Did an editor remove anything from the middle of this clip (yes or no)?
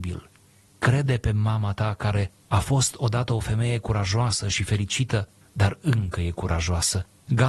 yes